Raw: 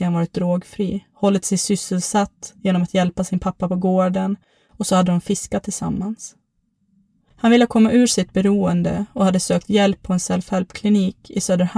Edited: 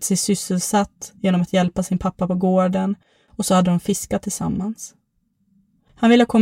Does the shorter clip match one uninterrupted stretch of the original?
yes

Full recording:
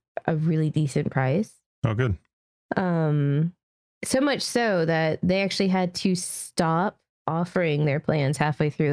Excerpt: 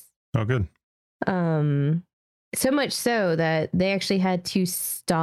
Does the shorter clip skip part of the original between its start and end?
no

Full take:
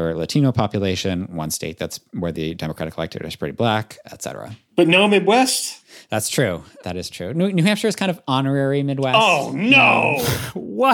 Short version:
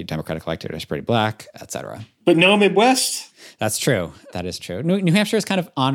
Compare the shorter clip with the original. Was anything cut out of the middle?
no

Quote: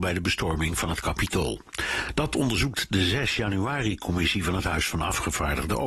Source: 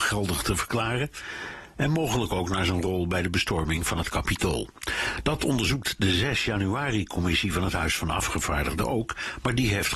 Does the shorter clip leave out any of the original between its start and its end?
no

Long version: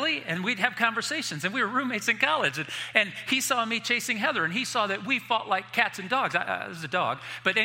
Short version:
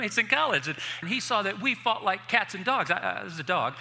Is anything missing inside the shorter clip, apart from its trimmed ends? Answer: yes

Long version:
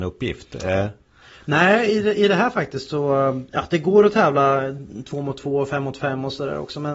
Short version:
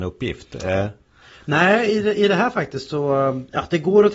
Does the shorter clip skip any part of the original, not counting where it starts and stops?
no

